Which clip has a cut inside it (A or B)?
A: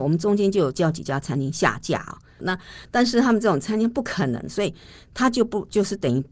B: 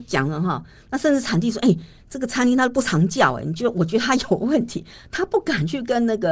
A